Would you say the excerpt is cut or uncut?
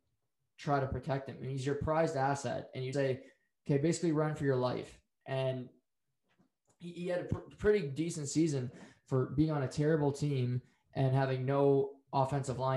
cut